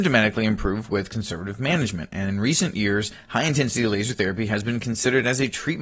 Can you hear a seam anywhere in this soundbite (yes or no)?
no